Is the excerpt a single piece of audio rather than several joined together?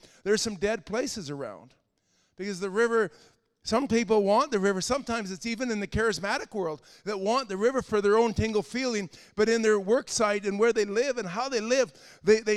yes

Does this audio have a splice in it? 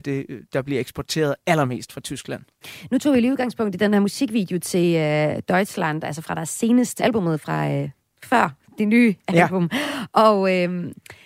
yes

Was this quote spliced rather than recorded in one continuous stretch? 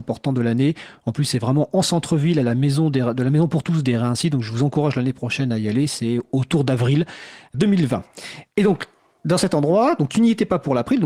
no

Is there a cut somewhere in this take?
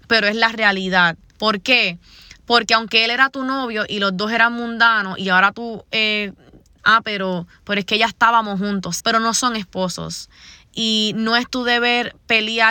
yes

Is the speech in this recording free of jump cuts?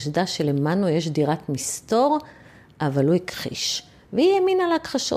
yes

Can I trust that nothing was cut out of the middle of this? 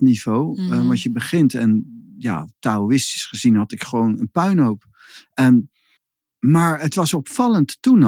yes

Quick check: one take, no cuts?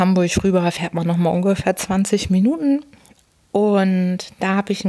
yes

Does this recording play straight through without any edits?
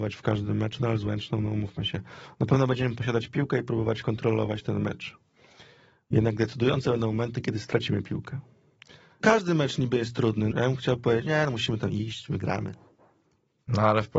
no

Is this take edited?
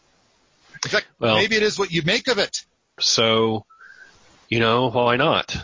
yes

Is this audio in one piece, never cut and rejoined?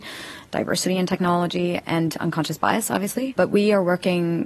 no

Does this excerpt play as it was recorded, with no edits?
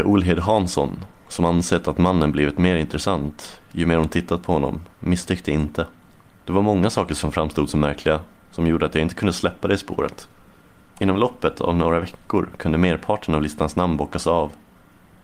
yes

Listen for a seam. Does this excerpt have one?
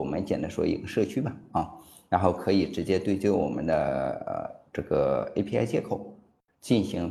no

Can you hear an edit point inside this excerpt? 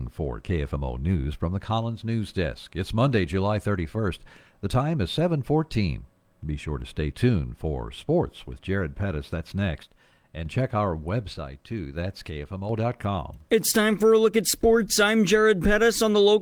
no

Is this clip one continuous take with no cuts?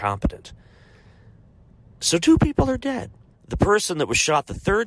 no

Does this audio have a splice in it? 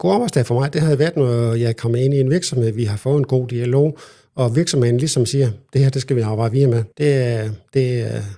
yes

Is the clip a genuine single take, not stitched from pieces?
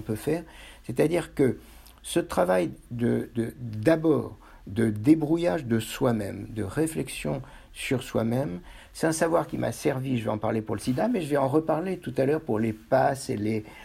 no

